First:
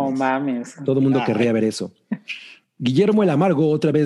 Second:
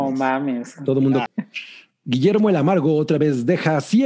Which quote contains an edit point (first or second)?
second